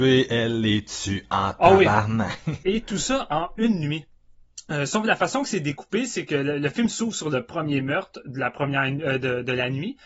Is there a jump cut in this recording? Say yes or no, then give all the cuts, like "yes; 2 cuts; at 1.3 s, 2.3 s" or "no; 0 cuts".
yes; 1 cut; at 2.6 s